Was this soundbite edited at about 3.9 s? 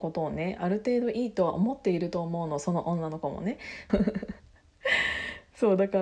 yes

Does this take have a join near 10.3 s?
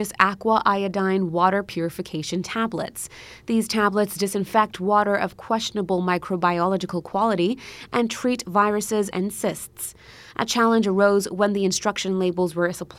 no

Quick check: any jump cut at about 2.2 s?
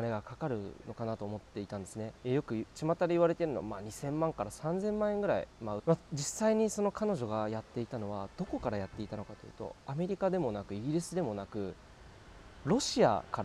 yes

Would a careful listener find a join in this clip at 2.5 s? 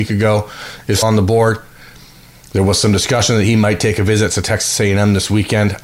no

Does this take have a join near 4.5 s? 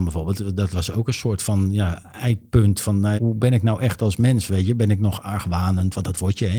no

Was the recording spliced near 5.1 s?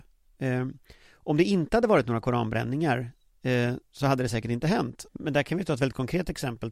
yes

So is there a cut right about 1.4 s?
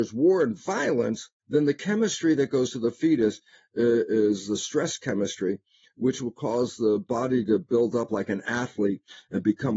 yes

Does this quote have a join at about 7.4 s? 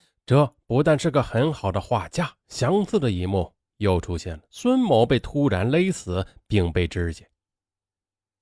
no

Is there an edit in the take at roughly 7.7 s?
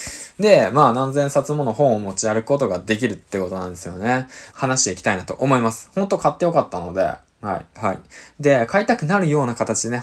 yes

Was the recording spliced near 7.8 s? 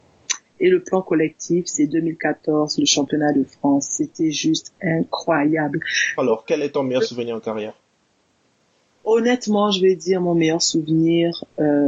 no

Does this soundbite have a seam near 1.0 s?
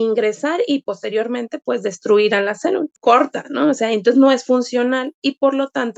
no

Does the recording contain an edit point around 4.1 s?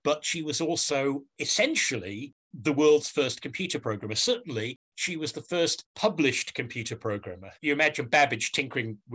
no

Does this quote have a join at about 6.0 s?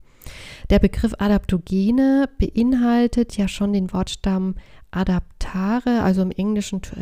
no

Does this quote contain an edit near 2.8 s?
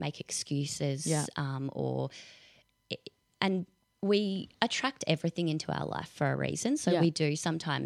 no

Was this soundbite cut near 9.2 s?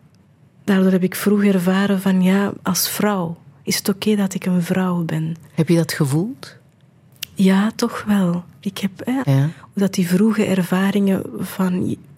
yes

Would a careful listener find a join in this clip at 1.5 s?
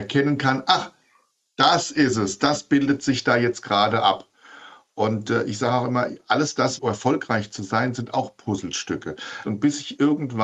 no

